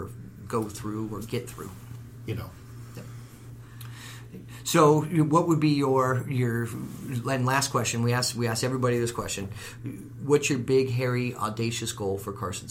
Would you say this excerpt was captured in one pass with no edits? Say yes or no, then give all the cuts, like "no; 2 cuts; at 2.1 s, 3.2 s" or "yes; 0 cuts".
no; 1 cut; at 2.3 s